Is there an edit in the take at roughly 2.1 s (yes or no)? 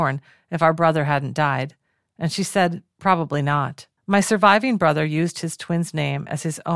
no